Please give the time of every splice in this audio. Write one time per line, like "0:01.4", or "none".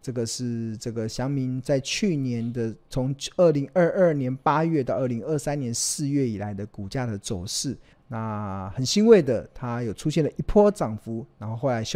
0:07.9